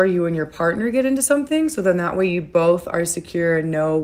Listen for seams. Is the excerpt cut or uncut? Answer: uncut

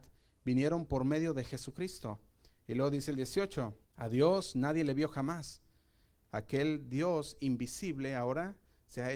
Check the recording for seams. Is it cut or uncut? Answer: cut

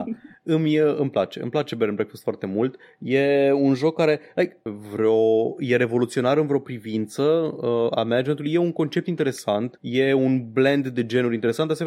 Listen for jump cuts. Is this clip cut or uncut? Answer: cut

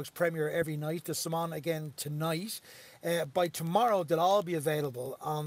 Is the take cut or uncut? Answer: uncut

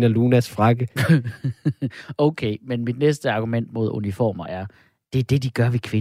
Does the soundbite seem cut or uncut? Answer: uncut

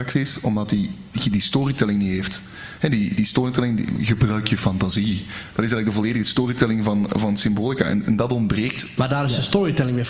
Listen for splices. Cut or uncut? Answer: cut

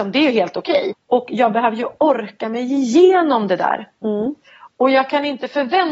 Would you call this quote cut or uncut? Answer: cut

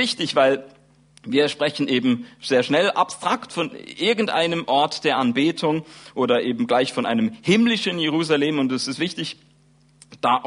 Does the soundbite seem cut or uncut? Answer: uncut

